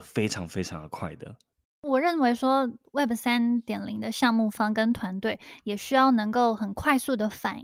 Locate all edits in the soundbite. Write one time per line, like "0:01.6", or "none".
none